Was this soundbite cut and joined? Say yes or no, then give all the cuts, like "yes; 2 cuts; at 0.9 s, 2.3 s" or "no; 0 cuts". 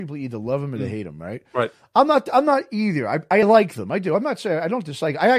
no; 0 cuts